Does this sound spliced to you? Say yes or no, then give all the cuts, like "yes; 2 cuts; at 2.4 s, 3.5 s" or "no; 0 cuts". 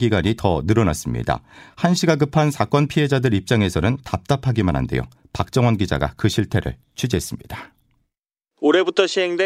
no; 0 cuts